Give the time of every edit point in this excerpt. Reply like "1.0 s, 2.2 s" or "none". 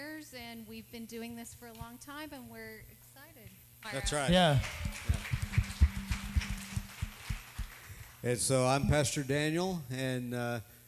3.8 s